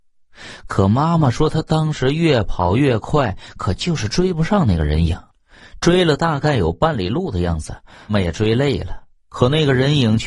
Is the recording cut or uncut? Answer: cut